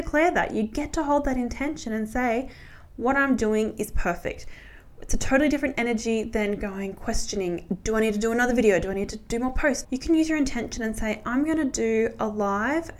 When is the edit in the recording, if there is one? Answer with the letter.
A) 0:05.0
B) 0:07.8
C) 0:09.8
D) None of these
C